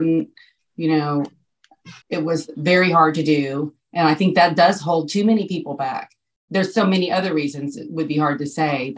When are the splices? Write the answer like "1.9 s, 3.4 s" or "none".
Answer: 2.0 s